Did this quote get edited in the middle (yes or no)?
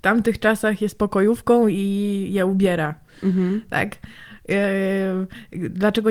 no